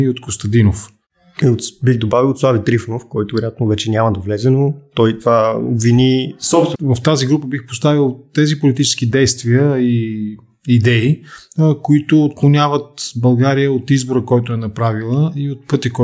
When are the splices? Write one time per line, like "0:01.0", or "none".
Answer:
0:06.7